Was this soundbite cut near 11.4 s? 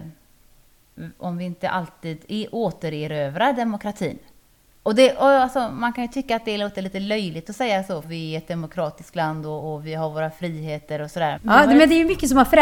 yes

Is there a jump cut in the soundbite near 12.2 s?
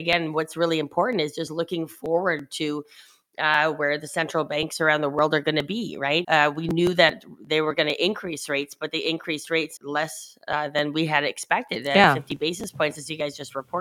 no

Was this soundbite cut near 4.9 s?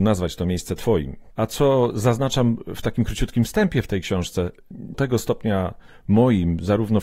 yes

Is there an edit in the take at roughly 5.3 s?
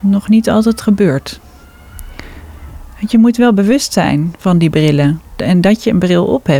no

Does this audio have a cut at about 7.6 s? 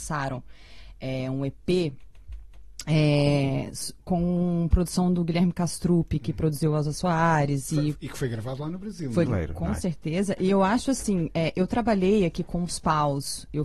no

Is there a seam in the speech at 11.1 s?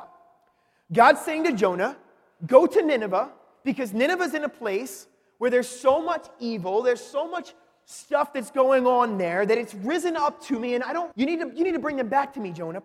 yes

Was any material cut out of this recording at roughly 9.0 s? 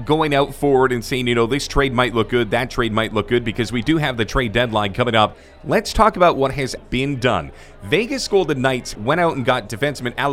yes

